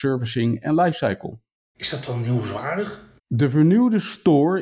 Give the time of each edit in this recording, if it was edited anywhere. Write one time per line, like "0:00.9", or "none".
0:01.7
0:03.2